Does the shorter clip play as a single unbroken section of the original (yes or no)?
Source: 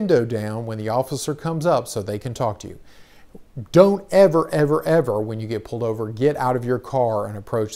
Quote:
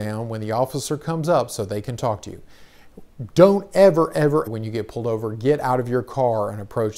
no